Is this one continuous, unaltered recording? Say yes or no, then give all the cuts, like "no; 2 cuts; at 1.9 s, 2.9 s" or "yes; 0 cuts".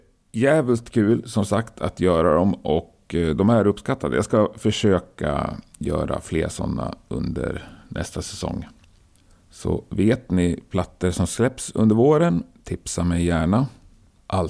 yes; 0 cuts